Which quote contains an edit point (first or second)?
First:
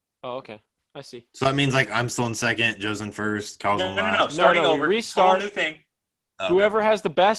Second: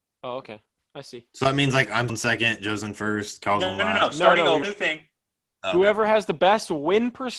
second